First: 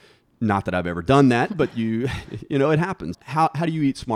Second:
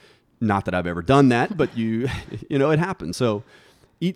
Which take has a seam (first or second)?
first